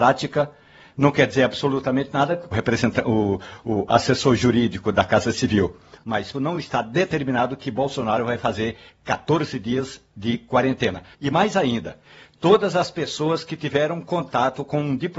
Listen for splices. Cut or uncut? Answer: cut